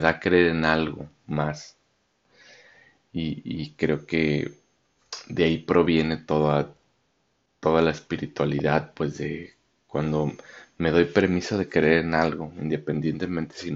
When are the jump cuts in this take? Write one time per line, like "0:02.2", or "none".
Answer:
none